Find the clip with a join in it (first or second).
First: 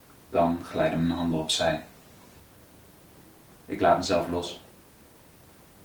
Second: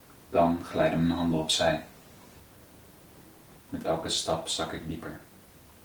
second